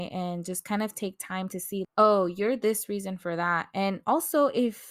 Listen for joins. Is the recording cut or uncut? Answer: cut